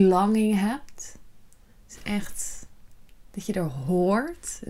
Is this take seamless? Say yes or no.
no